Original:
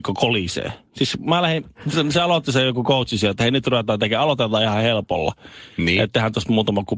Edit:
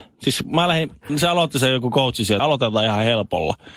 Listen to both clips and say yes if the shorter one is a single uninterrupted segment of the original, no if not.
no